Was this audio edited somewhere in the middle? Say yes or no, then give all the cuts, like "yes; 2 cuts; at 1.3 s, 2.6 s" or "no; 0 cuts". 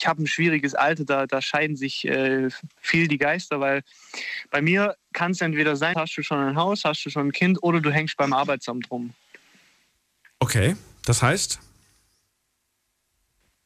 yes; 1 cut; at 5.9 s